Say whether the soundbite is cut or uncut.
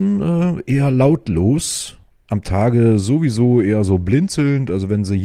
uncut